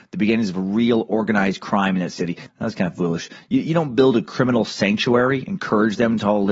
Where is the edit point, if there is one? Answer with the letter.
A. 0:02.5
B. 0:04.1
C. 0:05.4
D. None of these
A